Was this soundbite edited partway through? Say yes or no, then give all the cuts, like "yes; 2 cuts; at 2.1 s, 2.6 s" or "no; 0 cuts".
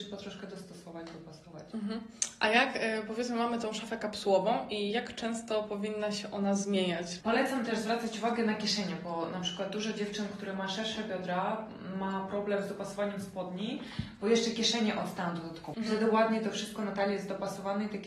yes; 2 cuts; at 7.2 s, 15.7 s